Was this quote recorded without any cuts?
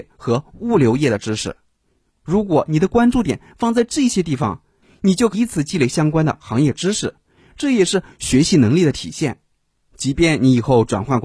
no; 1 cut; at 5.3 s

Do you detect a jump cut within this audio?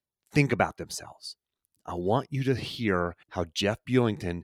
yes; 2 cuts; at 1.7 s, 3.2 s

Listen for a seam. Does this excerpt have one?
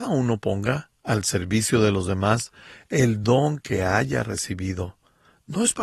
no; 0 cuts

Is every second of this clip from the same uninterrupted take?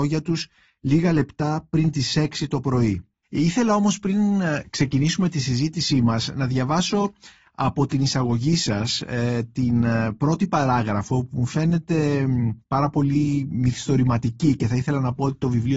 no; 1 cut; at 3.2 s

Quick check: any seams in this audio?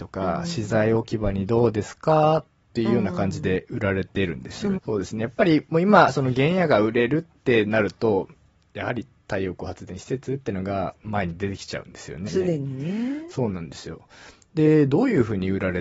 yes; 2 cuts; at 4.7 s, 12.3 s

